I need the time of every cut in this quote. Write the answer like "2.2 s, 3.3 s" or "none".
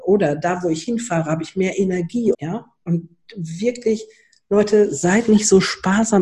2.3 s